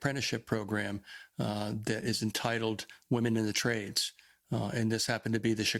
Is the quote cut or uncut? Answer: uncut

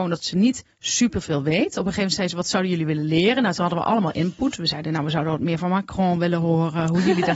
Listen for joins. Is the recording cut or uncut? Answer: uncut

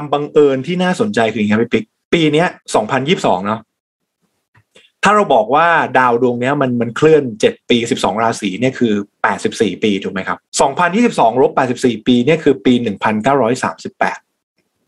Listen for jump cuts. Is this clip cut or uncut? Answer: cut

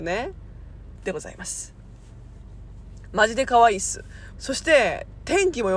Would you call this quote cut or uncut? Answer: cut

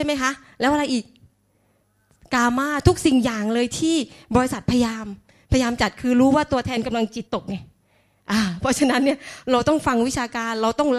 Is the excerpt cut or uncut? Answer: cut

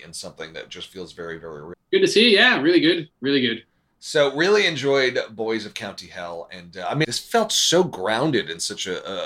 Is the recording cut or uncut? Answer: cut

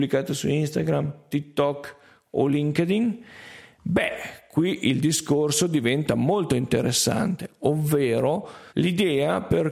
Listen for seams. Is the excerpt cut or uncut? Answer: cut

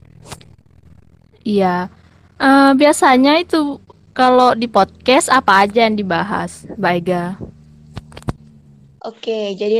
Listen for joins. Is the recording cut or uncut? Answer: uncut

